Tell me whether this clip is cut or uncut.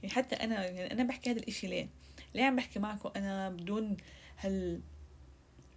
uncut